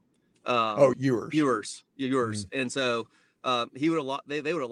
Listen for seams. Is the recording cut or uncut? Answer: cut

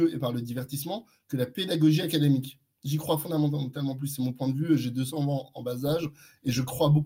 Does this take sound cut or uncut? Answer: uncut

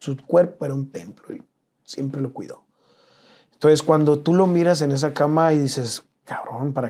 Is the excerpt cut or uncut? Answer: uncut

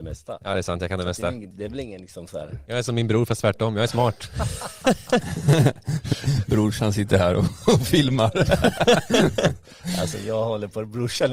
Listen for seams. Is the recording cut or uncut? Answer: cut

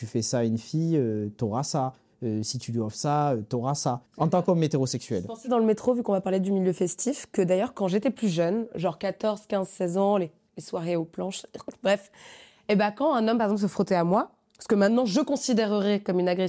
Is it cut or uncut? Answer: cut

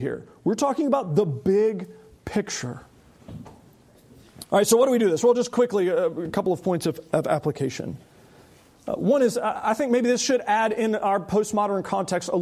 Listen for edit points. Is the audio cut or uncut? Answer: uncut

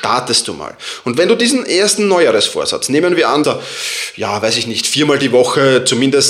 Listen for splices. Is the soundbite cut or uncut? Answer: cut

